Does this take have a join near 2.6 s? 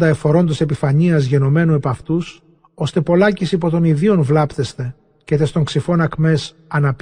yes; 1 cut; at 2.6 s

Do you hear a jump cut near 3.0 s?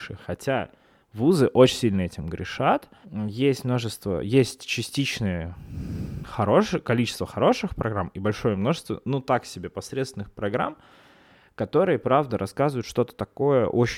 yes; 1 cut; at 3.0 s

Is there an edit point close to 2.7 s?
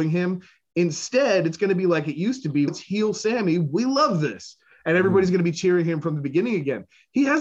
yes; 1 cut; at 2.7 s

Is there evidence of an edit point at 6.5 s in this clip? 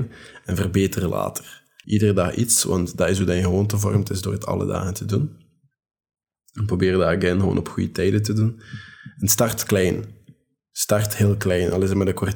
no; 1 cut; at 1.8 s

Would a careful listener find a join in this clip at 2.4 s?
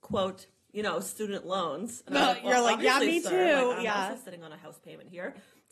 no; 0 cuts

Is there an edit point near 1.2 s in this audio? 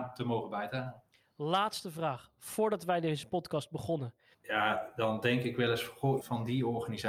no; 2 cuts; at 4.3 s, 6.2 s

